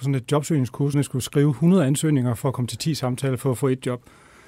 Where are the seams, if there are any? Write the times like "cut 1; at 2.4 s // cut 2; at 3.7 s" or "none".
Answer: cut 1; at 0.9 s